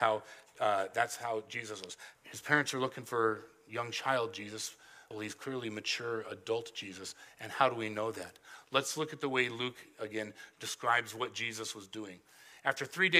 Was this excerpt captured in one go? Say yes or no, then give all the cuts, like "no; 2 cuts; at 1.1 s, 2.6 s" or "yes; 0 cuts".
no; 2 cuts; at 2.1 s, 5.1 s